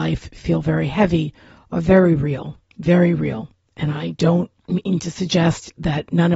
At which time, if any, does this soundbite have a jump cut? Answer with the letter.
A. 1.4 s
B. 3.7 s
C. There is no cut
C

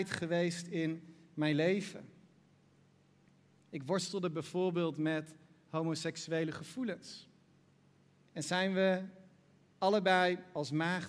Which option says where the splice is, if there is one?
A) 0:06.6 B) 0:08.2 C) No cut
B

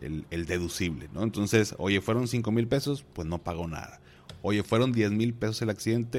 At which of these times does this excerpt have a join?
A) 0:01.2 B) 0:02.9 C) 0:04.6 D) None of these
D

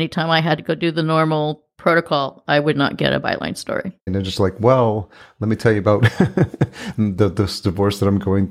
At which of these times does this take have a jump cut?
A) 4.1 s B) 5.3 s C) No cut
A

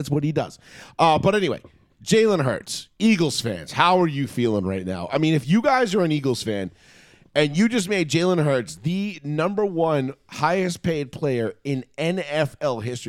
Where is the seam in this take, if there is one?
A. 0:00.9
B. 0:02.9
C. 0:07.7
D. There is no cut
D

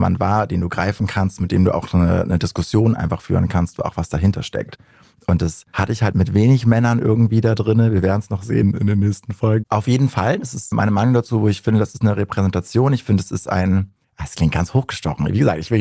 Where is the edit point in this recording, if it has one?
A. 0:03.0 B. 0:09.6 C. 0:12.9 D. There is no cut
B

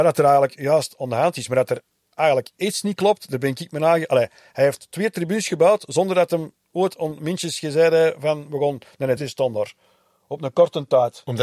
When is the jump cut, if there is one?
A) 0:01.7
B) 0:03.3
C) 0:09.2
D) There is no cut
C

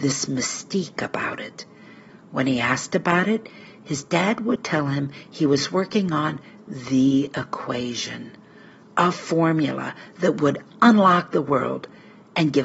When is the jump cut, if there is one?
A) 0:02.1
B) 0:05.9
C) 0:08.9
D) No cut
A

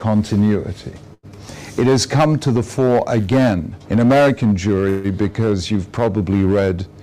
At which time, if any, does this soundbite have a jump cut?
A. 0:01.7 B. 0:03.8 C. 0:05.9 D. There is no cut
B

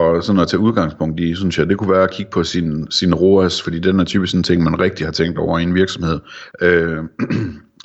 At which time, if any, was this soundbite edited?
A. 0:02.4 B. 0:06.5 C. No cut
B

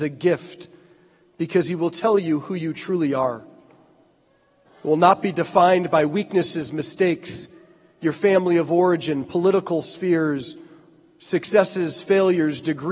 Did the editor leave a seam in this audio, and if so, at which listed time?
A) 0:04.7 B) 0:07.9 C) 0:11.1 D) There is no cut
A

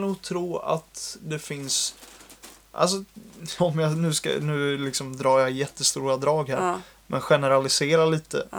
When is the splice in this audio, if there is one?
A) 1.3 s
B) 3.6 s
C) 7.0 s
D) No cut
B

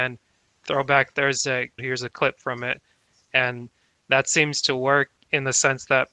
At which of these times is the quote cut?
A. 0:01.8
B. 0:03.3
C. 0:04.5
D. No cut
A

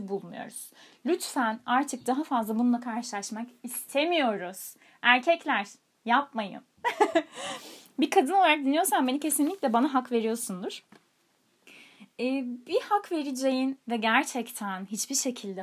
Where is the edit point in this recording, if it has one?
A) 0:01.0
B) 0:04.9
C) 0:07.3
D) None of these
D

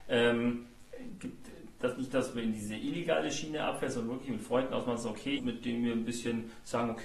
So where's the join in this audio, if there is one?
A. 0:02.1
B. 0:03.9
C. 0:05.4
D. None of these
C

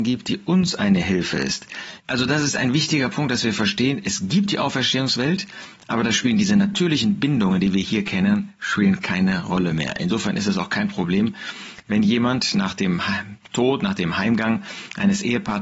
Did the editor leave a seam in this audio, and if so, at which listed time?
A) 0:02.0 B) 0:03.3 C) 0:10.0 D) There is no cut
A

